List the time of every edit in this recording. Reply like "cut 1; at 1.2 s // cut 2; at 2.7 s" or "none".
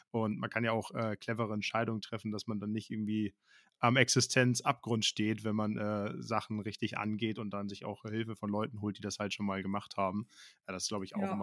none